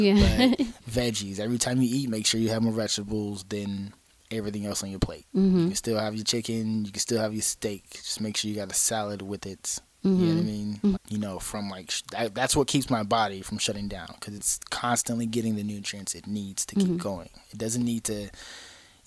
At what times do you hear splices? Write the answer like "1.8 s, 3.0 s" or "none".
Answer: 10.9 s